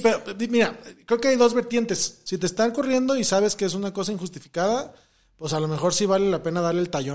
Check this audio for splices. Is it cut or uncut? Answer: uncut